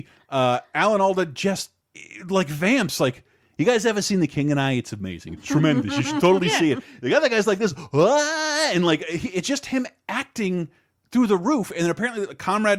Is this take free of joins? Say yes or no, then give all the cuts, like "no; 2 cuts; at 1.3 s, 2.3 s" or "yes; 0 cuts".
yes; 0 cuts